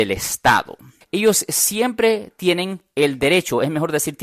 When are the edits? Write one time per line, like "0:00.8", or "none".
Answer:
0:01.0

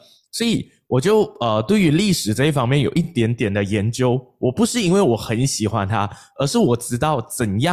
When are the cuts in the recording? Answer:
none

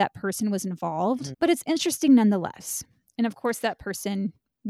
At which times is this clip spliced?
0:01.3

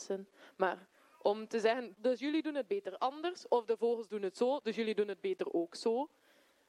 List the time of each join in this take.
0:01.9

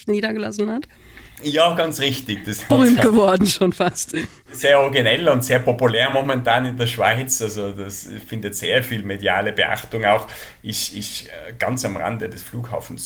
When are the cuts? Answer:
0:02.7

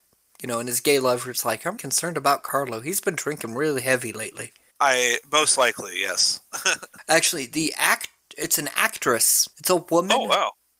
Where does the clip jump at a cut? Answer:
0:01.8
0:04.7

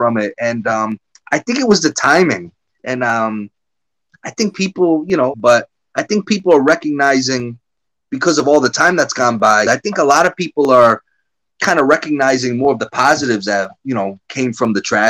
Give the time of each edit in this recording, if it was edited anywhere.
0:02.8
0:05.3
0:09.7

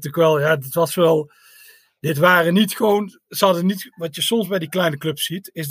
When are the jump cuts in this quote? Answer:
none

